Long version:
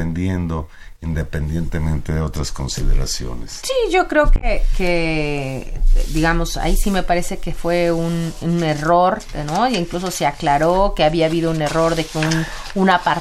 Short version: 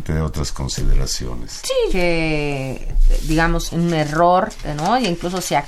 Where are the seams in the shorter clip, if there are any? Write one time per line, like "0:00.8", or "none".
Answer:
0:01.9
0:03.7